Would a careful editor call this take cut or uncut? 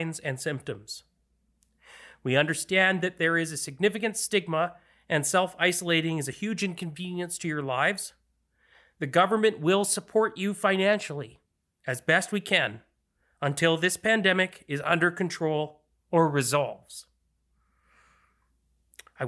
uncut